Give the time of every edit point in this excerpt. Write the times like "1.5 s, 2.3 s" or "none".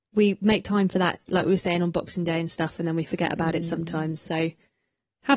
none